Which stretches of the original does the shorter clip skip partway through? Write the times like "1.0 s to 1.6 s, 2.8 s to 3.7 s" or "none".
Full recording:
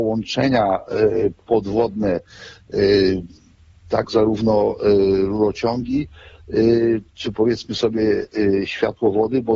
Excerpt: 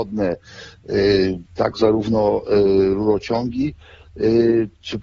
3.3 s to 3.8 s